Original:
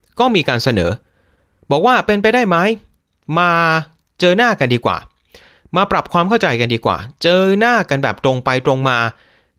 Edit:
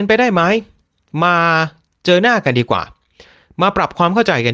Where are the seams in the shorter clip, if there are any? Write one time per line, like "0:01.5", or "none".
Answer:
none